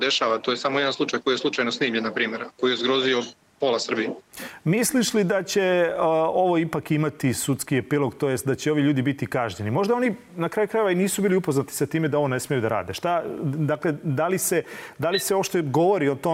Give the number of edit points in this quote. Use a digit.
0